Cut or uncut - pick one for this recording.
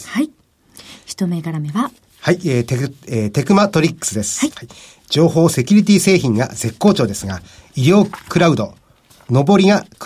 cut